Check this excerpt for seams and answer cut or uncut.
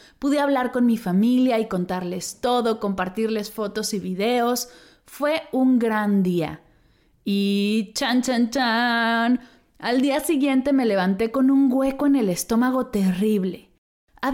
uncut